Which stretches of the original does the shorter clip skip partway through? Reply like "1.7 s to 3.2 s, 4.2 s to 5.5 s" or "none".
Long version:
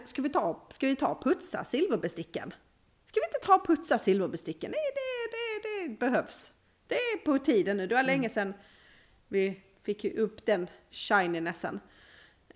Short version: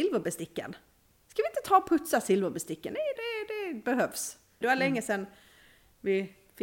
4.9 s to 5.3 s, 6.8 s to 7.9 s